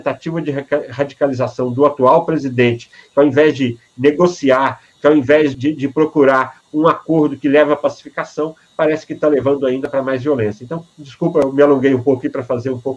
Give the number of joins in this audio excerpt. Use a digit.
1